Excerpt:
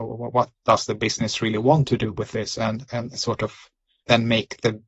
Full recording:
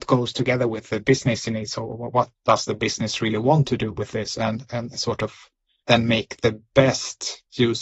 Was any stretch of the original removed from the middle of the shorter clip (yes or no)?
no